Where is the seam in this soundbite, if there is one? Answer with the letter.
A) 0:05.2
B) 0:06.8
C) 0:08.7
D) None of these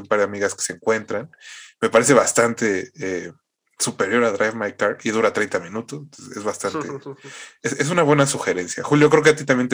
D